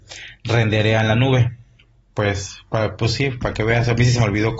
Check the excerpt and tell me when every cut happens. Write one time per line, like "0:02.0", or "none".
0:02.1